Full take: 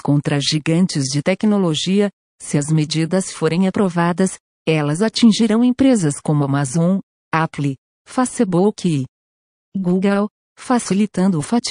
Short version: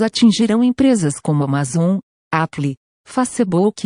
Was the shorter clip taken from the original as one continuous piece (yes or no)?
yes